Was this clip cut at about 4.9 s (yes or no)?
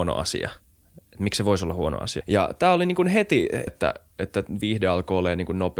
no